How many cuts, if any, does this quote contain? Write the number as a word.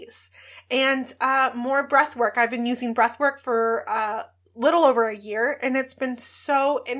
zero